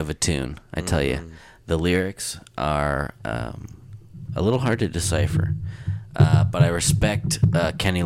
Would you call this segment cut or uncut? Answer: uncut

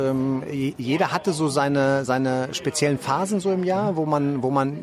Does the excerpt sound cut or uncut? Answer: uncut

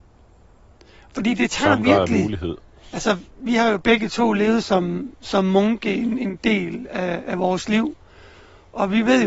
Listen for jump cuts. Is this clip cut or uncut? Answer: uncut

